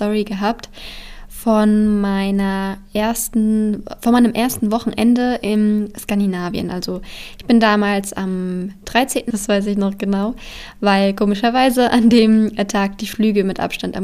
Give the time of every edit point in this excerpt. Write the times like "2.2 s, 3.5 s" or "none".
9.3 s